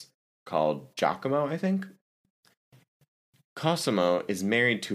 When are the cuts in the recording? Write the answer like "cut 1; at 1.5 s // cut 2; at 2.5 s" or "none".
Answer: none